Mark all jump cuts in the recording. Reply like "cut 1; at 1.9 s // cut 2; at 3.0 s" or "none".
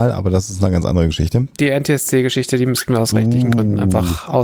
cut 1; at 1.6 s